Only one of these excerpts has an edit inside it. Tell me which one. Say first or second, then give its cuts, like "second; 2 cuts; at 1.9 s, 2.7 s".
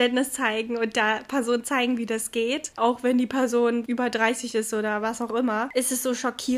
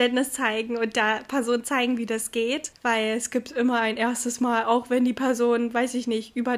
first; 2 cuts; at 2.8 s, 3.9 s